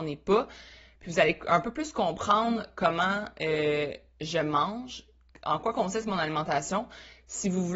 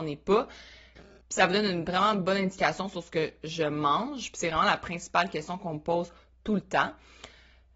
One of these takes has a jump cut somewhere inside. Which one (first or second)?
second